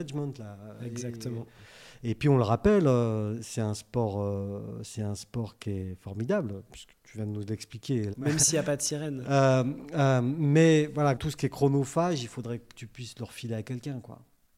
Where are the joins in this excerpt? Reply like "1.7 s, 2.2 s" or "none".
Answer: 8.1 s, 9.2 s, 11.1 s